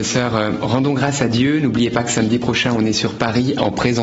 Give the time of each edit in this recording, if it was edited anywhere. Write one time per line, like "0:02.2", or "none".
none